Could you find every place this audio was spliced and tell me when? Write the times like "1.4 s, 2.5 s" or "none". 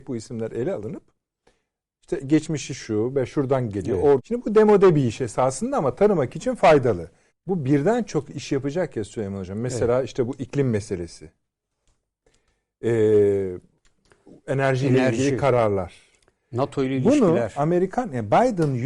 4.2 s, 7.3 s